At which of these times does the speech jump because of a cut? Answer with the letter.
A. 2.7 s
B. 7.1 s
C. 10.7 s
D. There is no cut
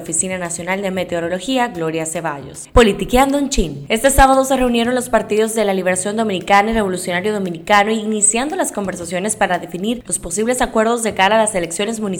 A